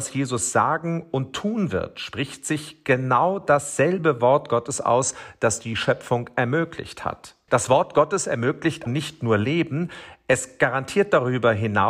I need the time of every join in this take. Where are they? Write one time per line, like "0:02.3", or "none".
0:07.5
0:08.9